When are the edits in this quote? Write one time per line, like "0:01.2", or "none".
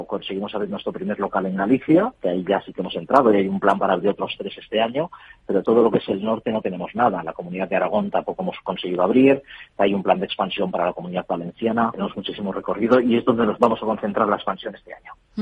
0:11.9